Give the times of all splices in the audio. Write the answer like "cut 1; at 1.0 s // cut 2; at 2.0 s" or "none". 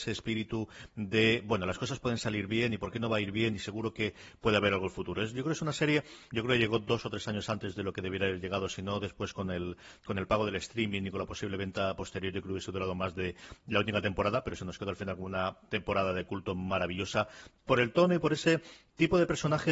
cut 1; at 6.3 s